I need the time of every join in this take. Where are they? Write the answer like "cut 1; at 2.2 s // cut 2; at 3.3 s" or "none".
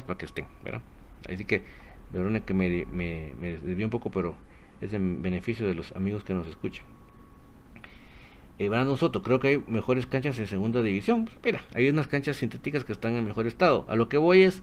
none